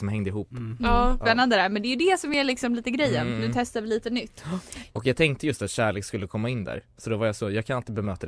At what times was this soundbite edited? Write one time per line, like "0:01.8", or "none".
0:01.2
0:04.9